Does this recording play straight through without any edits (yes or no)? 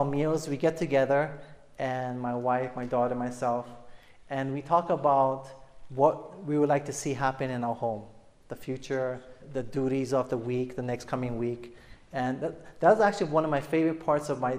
no